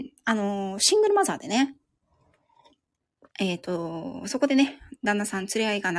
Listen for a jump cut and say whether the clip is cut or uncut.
cut